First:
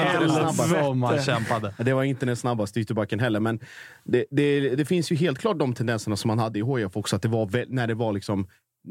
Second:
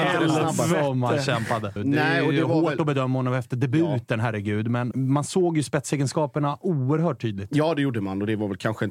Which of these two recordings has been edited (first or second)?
second